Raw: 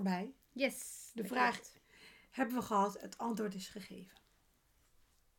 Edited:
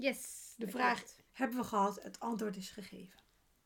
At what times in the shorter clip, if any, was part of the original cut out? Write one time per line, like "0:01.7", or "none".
0:01.3